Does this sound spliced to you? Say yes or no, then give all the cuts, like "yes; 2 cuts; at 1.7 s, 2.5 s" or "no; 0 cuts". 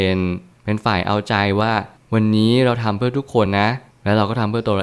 no; 0 cuts